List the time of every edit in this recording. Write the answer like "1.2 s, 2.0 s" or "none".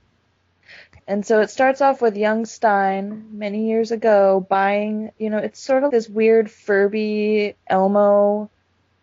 1.0 s, 5.9 s